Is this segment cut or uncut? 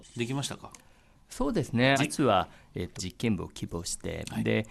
cut